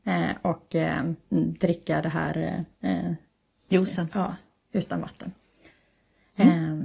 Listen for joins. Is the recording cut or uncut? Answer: uncut